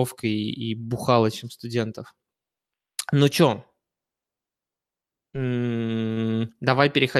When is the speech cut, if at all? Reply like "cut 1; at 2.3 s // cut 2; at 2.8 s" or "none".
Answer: none

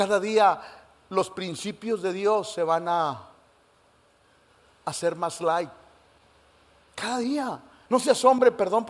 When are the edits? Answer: cut 1; at 7.9 s

